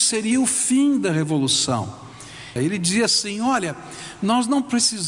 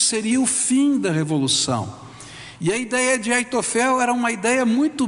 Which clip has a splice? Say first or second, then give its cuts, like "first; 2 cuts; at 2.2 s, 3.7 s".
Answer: first; 1 cut; at 2.6 s